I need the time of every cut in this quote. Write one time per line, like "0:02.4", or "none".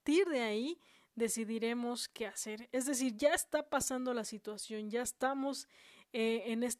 none